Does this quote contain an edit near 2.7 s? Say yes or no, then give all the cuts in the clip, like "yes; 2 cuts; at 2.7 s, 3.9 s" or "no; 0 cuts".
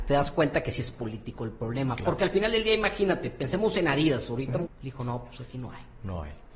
no; 1 cut; at 4.7 s